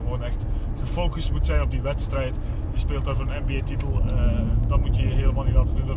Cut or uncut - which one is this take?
uncut